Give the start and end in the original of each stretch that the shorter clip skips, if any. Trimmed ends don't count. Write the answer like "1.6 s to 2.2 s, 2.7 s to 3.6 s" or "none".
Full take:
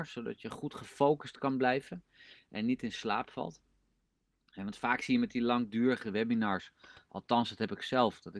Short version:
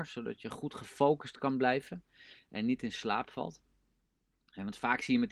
none

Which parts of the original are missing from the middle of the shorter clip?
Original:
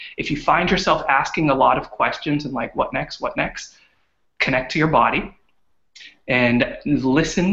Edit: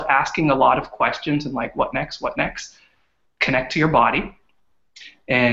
none

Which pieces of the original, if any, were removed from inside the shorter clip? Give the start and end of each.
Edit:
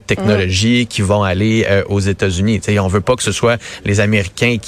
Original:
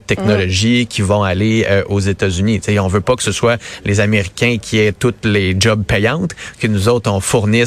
none

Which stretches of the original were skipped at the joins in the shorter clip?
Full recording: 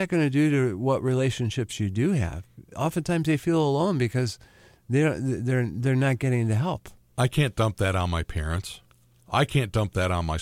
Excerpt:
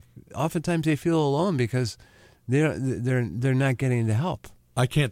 none

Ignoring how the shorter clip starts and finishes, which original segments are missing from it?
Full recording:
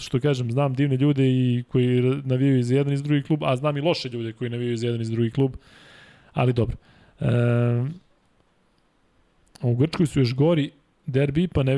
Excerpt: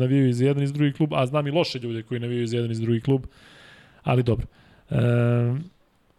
none

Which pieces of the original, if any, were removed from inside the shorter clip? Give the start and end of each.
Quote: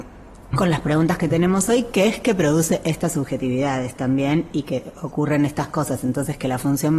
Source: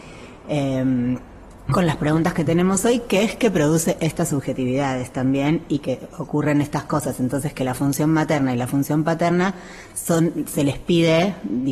none

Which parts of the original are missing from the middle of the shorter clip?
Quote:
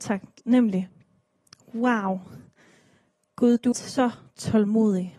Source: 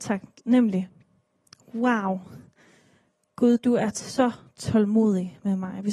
3.7 s to 3.9 s

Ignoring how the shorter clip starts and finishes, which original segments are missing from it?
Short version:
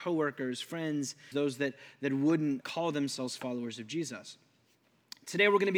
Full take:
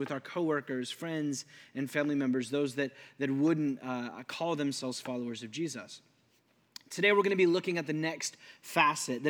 1.6 s to 2.5 s, 3.8 s to 4.3 s

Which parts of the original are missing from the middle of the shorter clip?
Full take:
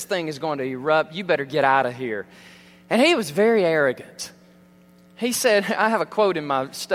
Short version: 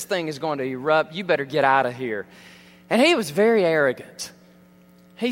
none

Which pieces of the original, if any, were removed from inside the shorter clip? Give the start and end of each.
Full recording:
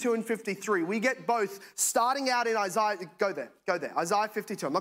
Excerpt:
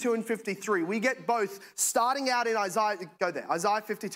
3.1 s to 3.6 s

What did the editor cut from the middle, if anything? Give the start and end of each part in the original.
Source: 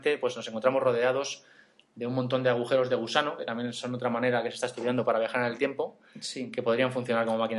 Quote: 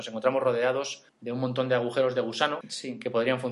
1.5 s to 1.8 s, 3.4 s to 6.1 s

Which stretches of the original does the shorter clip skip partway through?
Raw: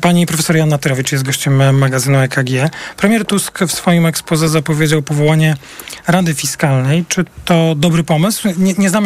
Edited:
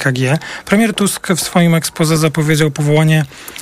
none

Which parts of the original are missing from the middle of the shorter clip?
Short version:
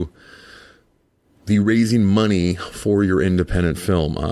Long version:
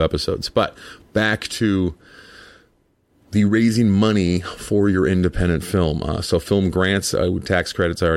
none

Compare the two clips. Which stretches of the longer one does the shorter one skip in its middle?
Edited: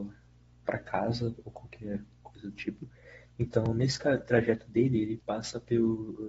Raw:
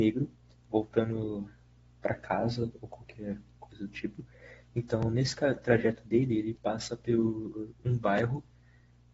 none

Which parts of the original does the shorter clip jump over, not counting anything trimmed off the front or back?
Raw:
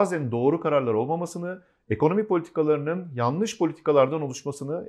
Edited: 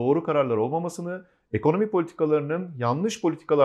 none

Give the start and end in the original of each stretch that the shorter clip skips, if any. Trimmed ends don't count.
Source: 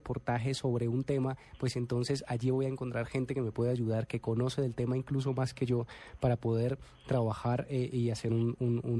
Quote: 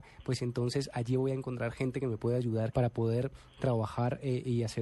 4.1 s to 6.2 s

